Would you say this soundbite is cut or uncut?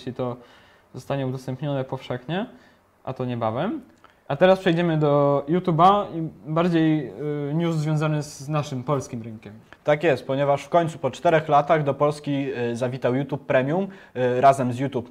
uncut